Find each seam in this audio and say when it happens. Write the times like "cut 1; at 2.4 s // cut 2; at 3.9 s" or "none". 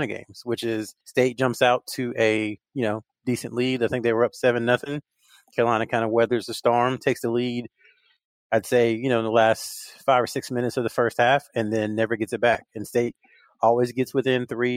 none